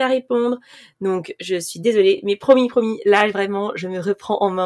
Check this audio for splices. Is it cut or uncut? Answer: uncut